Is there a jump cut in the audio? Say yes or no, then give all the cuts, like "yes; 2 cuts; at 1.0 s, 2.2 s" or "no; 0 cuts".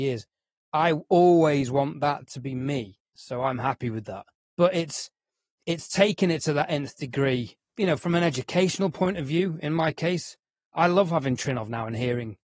yes; 2 cuts; at 3.2 s, 4.4 s